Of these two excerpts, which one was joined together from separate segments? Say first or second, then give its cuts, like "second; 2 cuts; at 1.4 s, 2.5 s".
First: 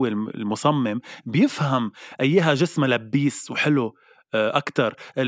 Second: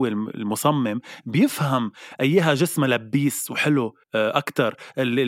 second; 1 cut; at 4.0 s